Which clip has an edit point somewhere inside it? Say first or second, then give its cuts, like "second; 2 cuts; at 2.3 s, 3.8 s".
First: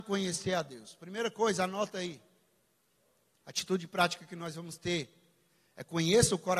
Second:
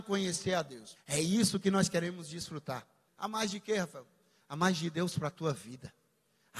second; 2 cuts; at 1.0 s, 3.1 s